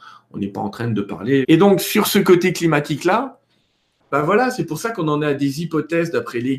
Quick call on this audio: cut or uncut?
cut